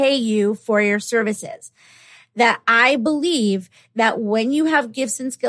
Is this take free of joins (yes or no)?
yes